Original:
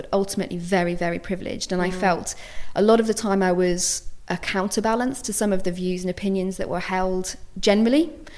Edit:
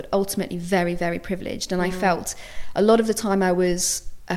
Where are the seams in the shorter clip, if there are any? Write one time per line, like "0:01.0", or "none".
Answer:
none